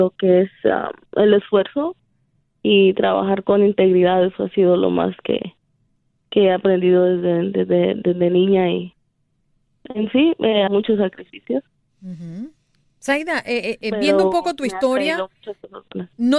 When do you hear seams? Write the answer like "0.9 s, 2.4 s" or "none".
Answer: 10.7 s